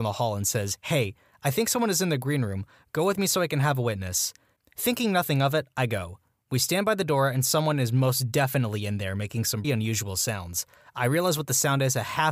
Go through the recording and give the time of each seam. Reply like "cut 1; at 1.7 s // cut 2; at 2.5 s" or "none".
cut 1; at 9.6 s